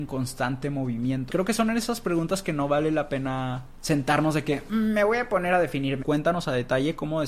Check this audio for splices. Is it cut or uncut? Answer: cut